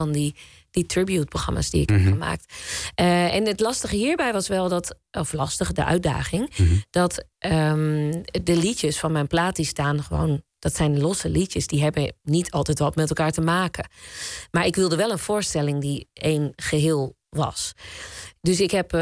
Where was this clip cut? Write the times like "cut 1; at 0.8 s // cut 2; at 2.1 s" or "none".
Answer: none